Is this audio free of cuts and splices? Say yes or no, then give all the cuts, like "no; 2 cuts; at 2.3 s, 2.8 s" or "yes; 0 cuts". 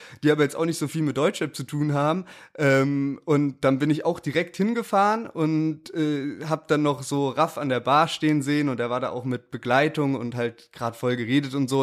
yes; 0 cuts